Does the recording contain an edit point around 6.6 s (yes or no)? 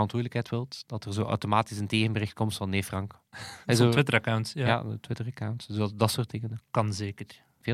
yes